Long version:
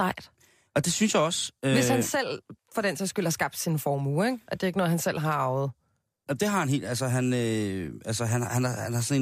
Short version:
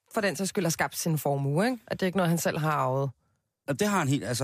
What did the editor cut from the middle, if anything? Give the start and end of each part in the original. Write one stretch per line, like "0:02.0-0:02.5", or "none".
none